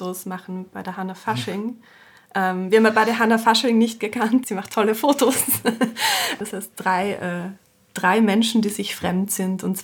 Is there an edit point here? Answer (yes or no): yes